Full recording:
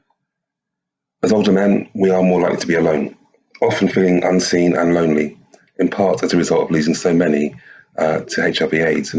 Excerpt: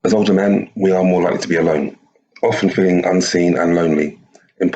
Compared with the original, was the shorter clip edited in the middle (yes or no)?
no